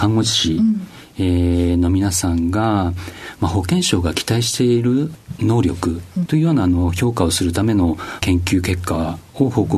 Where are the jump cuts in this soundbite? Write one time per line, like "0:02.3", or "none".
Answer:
0:06.3

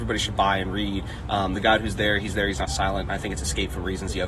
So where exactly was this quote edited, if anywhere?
none

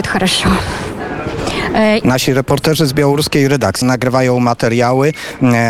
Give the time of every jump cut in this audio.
0:02.0
0:03.8

